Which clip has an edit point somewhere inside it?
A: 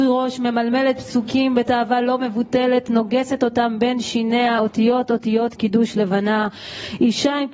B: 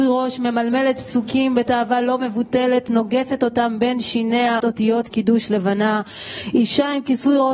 B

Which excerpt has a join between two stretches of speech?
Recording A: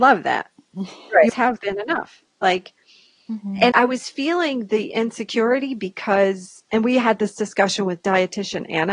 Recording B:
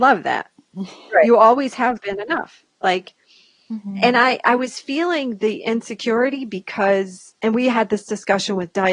A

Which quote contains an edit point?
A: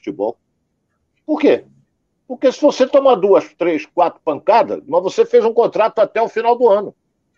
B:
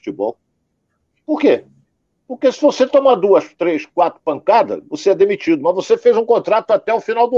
A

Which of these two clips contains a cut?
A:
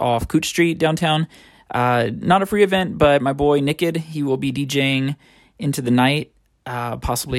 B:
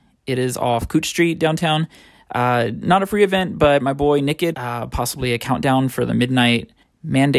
B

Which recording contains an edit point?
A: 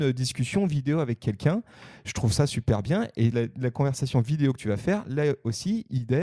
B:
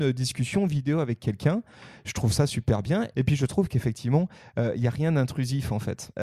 B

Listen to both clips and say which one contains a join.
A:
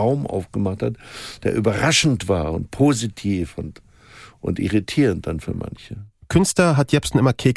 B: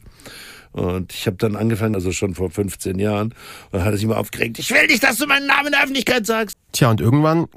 B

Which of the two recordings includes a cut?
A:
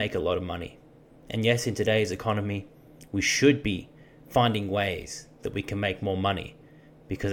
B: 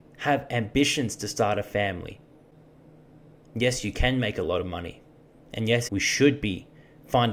B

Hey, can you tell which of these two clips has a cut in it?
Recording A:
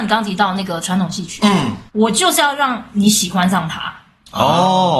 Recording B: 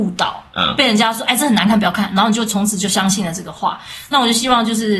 A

